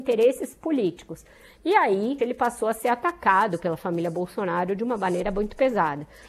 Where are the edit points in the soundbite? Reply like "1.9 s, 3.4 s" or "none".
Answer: 2.2 s